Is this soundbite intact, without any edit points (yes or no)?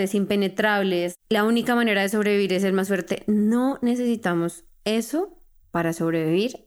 yes